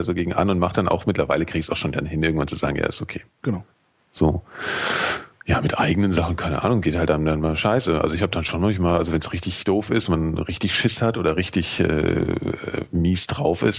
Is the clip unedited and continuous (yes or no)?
no